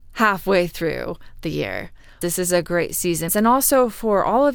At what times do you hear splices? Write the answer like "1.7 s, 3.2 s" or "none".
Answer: 2.2 s, 3.3 s